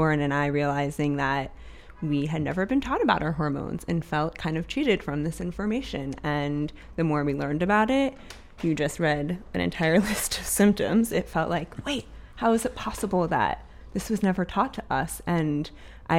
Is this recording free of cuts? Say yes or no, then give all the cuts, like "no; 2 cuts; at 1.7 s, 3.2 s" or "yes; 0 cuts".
yes; 0 cuts